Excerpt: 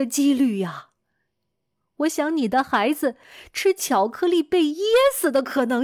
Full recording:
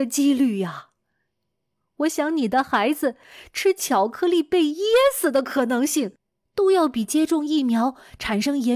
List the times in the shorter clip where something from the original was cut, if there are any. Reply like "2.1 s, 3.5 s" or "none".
none